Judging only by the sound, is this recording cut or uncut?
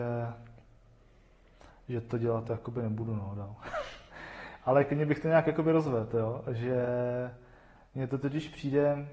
uncut